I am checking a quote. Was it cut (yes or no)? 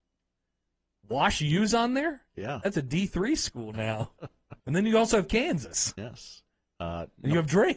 yes